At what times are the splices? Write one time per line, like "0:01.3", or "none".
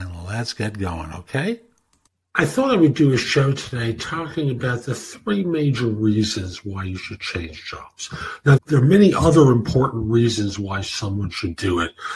0:08.6